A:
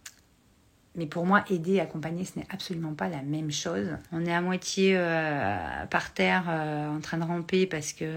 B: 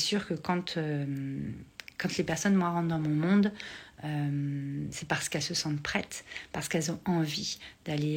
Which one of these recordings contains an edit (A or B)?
A